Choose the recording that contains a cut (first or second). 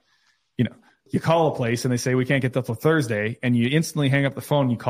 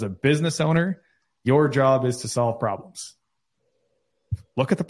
first